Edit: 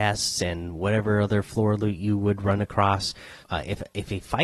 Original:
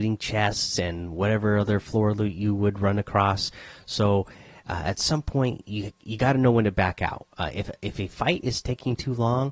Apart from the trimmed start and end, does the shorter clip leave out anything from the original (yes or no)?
yes